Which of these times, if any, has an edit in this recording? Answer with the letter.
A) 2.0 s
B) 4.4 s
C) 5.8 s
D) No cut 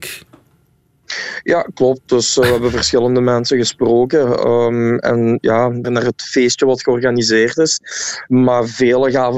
C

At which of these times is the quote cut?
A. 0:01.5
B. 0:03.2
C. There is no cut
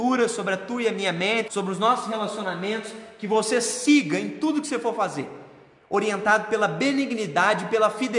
A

